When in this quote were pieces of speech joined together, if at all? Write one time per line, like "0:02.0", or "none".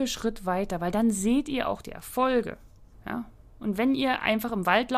0:02.9